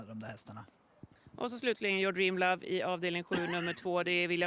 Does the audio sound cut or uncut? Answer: uncut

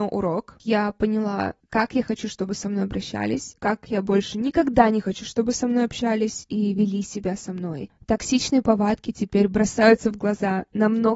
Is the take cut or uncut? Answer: uncut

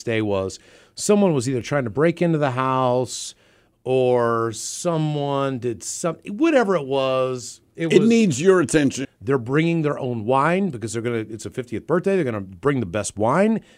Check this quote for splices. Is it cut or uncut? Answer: cut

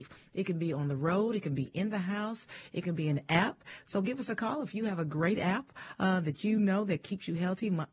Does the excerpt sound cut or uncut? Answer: uncut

